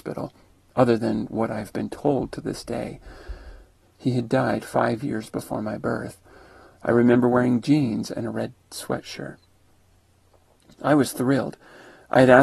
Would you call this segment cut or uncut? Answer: cut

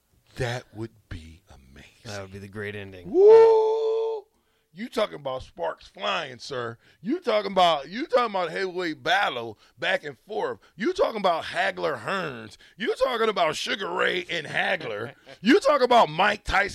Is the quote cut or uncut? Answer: uncut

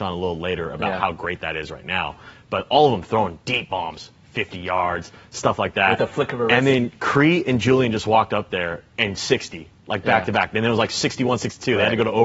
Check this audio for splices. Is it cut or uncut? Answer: uncut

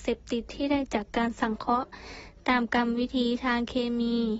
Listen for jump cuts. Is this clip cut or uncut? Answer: uncut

